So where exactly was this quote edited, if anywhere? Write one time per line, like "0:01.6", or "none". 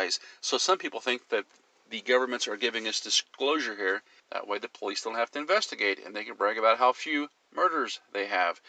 0:04.2